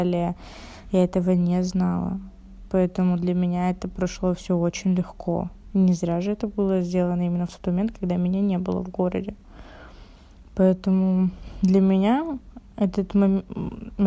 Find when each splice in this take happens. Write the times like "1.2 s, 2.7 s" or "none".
none